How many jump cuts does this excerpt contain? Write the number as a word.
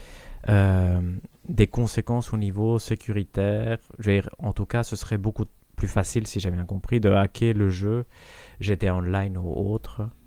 zero